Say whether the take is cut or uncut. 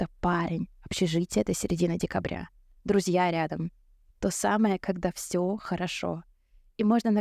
cut